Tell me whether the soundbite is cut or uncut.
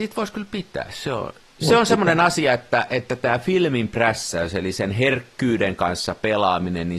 uncut